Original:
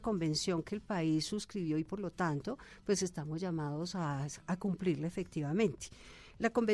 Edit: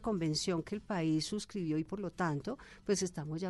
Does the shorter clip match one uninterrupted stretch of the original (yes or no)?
yes